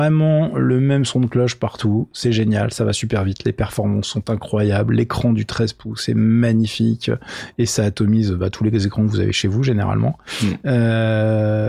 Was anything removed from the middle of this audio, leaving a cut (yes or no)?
no